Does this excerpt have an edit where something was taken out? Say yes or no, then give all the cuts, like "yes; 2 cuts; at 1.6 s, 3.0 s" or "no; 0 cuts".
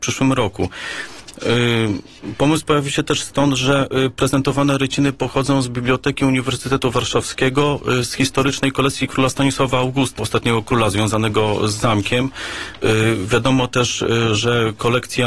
yes; 1 cut; at 10.2 s